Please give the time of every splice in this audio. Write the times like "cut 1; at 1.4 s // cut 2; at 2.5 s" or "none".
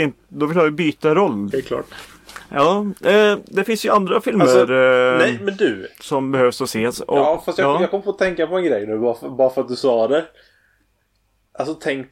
cut 1; at 1.5 s